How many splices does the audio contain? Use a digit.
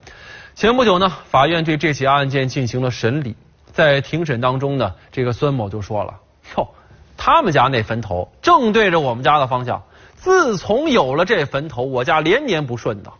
0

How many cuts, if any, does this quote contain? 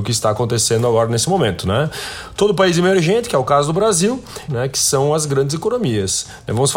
1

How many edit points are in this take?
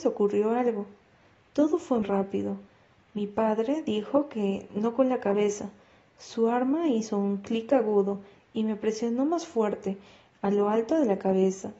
1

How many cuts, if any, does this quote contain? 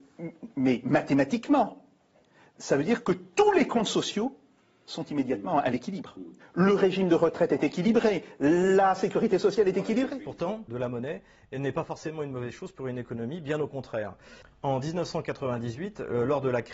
3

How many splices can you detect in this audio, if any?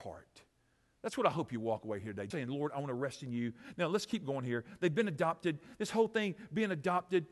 1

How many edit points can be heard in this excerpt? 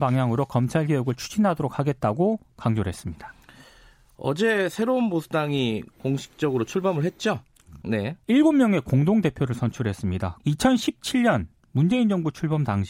2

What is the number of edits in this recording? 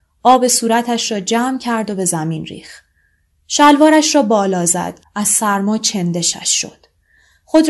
1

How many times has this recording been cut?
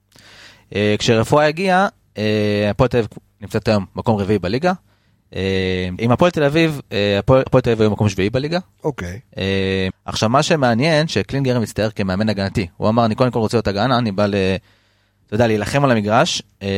3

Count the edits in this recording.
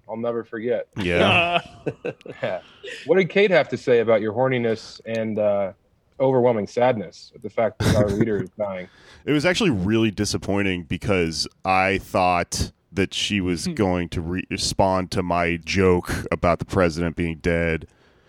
3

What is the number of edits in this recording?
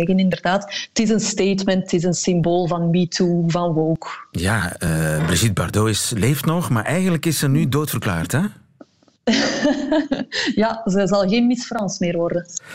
0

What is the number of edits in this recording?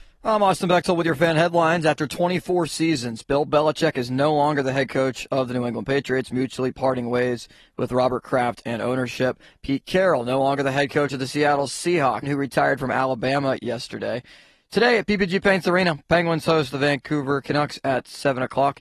1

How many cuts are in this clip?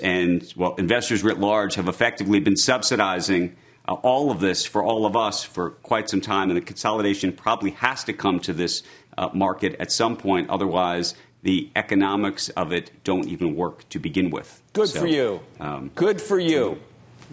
0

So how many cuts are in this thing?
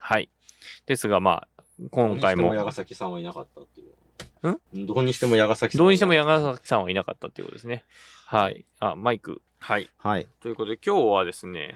1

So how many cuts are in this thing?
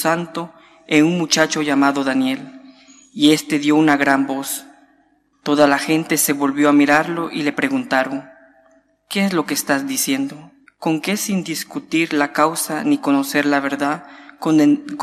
2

